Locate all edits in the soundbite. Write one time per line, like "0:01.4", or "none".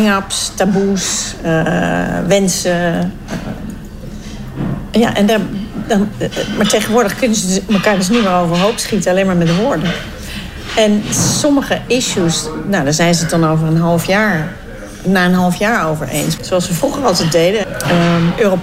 0:16.4
0:17.6